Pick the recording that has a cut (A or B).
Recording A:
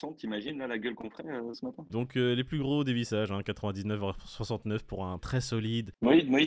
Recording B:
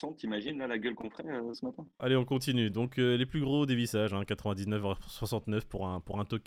A